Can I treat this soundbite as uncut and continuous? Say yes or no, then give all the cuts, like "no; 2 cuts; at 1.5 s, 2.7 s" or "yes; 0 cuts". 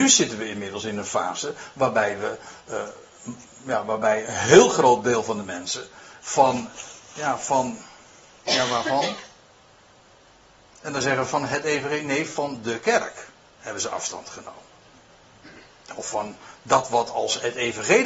no; 2 cuts; at 4.2 s, 6.2 s